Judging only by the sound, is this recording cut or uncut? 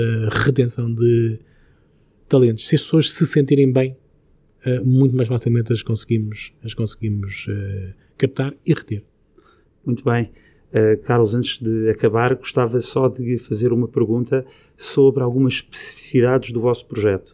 uncut